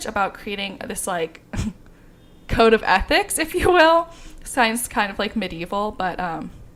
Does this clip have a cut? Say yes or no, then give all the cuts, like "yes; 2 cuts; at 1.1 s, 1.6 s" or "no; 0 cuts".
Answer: no; 0 cuts